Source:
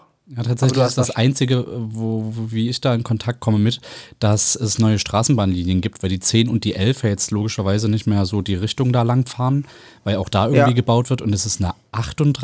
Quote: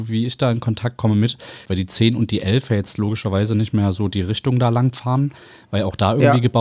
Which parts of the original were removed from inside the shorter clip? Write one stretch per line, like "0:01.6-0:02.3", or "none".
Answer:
0:04.1-0:06.0